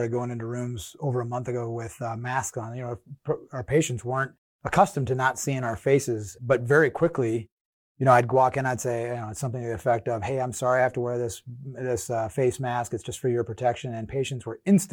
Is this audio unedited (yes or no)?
no